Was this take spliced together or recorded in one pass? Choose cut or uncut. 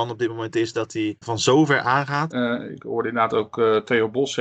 cut